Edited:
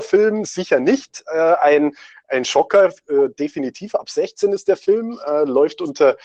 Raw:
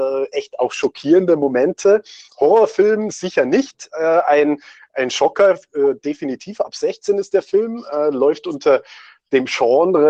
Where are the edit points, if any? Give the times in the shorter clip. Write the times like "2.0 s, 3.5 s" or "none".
none